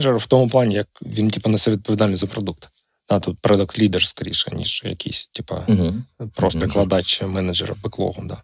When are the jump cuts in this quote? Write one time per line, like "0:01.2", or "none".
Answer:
0:06.6